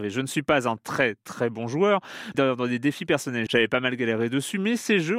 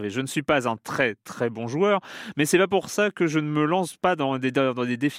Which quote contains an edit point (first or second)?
first